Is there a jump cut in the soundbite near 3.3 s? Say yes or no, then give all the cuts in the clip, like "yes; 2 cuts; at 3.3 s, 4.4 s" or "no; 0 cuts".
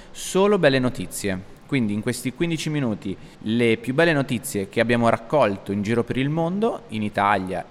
yes; 1 cut; at 3.3 s